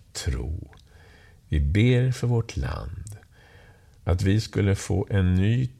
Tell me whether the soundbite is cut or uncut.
uncut